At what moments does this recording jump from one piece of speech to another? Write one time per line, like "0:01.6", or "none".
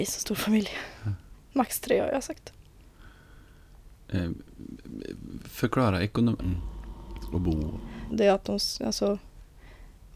0:06.4
0:08.1